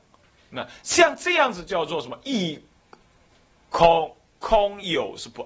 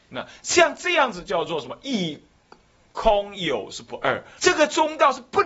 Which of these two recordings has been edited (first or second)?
second